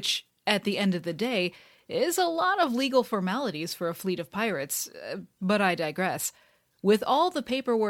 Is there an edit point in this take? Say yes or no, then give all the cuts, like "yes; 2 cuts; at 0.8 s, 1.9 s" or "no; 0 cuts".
no; 0 cuts